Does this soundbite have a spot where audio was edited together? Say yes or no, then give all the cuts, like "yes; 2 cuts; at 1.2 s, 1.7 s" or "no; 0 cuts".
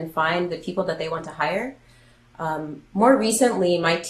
no; 0 cuts